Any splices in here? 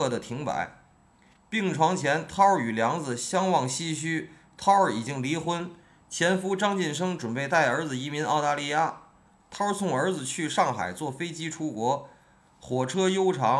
no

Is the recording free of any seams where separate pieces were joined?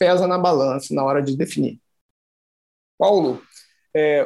yes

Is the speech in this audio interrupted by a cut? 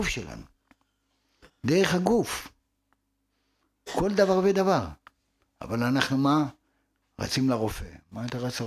no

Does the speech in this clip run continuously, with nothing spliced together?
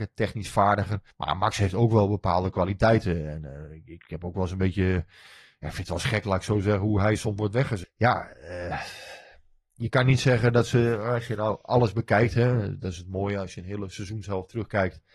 no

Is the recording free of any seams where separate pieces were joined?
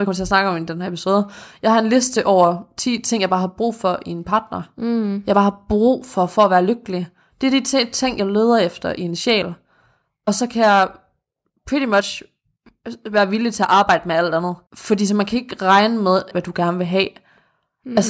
no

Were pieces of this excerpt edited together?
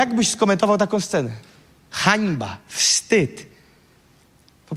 no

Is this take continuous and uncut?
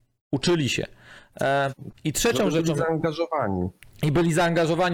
yes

